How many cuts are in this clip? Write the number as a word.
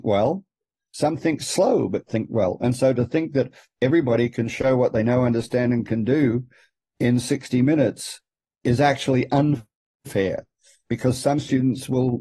zero